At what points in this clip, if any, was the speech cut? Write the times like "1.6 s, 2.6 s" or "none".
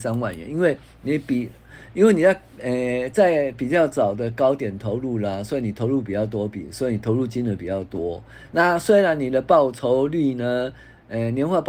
none